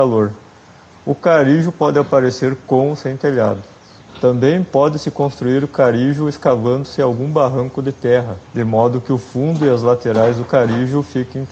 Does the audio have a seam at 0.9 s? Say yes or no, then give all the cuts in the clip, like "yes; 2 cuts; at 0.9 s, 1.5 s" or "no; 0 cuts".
no; 2 cuts; at 4.0 s, 8.4 s